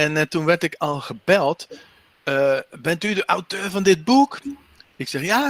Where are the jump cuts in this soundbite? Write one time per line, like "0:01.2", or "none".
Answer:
none